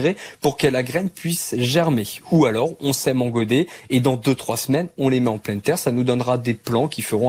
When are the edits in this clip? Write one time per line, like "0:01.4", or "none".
none